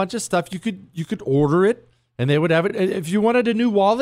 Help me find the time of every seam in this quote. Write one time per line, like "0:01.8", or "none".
none